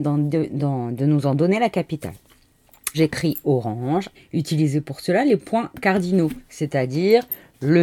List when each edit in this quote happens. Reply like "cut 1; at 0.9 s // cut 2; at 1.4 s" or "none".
cut 1; at 2.9 s // cut 2; at 4.1 s

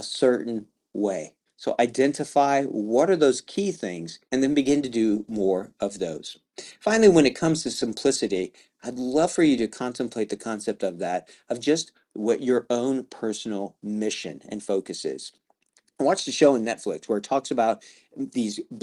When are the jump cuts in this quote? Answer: cut 1; at 1.5 s // cut 2; at 4.3 s

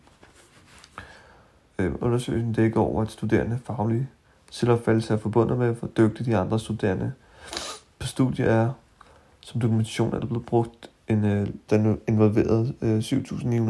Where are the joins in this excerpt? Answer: cut 1; at 1.7 s // cut 2; at 11.7 s

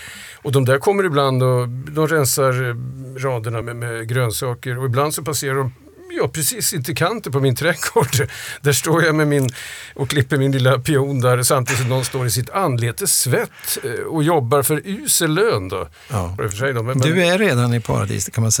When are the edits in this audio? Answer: cut 1; at 3.6 s // cut 2; at 16.4 s

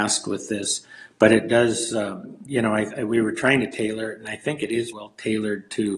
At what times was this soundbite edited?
cut 1; at 2.5 s // cut 2; at 4.9 s

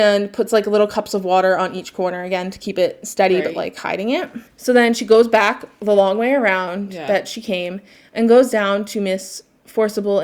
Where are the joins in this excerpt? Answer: none

